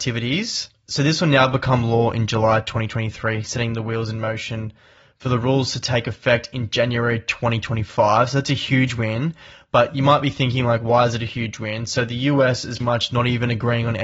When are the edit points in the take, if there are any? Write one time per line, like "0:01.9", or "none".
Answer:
0:12.8